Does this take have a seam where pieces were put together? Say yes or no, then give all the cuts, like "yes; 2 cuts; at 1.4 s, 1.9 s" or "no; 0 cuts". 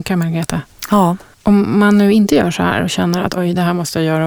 yes; 1 cut; at 3.4 s